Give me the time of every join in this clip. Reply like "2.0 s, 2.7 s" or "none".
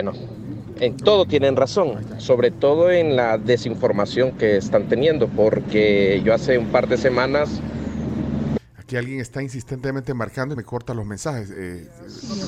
8.6 s, 10.6 s